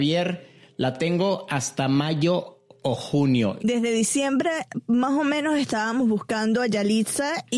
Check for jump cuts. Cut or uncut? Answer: cut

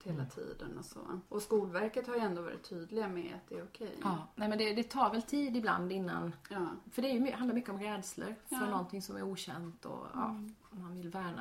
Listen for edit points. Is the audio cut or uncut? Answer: cut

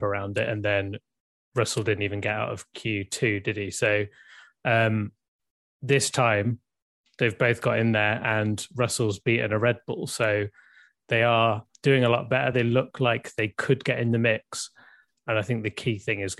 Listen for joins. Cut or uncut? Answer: uncut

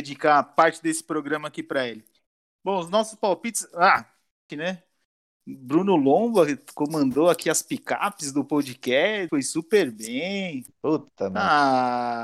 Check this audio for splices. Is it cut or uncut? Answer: cut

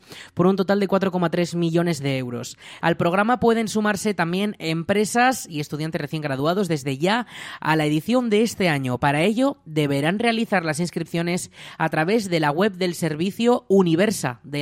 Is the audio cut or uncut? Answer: cut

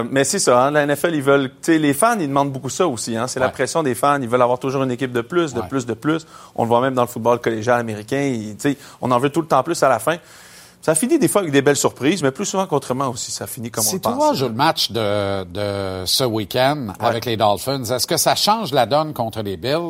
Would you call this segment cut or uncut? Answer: uncut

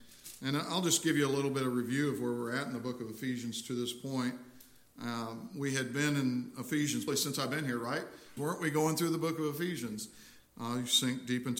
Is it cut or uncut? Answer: cut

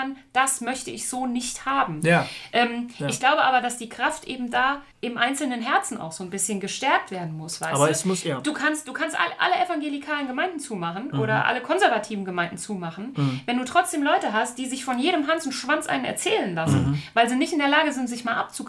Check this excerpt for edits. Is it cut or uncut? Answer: cut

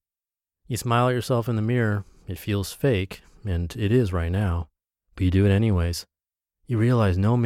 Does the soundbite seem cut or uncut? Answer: uncut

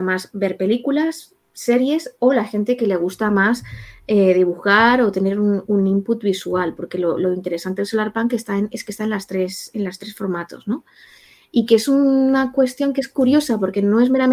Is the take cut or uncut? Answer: uncut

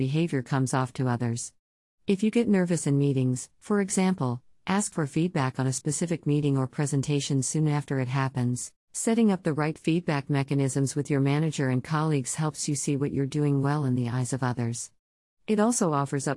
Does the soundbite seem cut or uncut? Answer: cut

